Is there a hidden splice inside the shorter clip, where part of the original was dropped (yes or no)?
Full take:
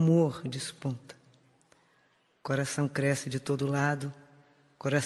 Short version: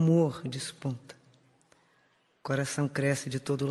no